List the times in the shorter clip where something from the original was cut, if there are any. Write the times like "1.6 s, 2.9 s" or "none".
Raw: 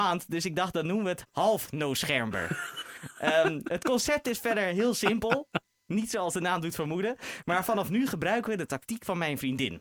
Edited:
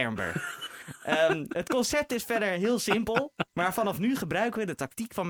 3.5 s